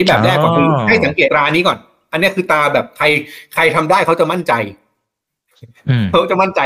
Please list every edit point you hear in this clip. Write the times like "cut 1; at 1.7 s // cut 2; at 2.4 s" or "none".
cut 1; at 1.3 s